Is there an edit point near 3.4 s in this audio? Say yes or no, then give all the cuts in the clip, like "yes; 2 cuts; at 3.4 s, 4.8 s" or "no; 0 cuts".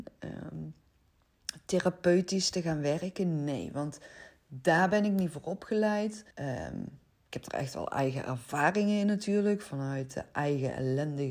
no; 1 cut; at 6.3 s